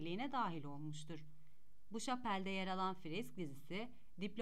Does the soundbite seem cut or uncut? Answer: uncut